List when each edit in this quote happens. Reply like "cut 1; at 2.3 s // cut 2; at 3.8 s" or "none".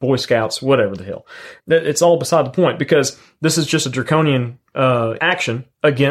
cut 1; at 1.6 s // cut 2; at 5.2 s